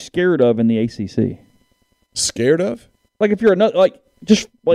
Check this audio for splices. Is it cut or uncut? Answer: uncut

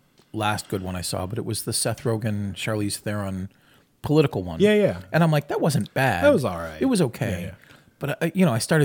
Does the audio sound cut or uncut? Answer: uncut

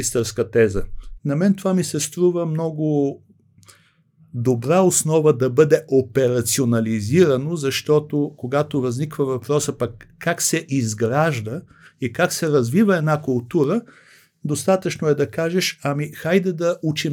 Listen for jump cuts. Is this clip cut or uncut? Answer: cut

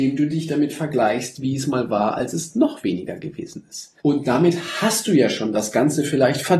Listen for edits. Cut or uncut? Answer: cut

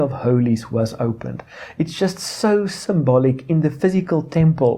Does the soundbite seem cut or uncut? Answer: uncut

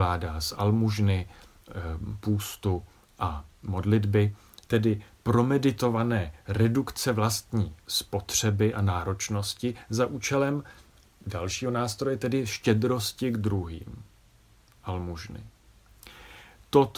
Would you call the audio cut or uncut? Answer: uncut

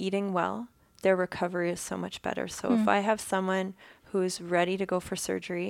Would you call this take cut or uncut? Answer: uncut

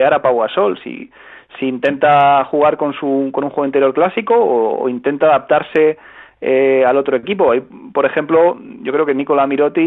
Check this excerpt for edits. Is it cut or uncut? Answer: uncut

